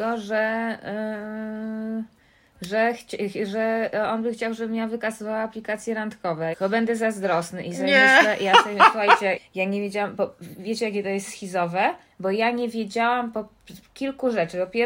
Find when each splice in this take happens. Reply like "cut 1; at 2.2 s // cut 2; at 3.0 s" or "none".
cut 1; at 6.5 s // cut 2; at 9.4 s